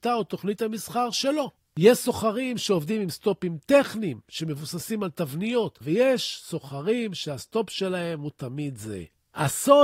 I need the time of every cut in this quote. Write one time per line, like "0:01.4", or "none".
0:05.8